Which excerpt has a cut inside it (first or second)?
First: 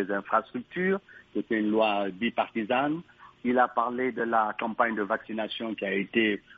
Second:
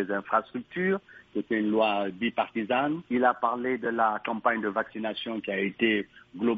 second